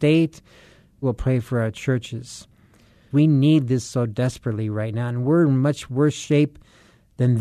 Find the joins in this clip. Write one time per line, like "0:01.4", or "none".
0:01.0
0:03.1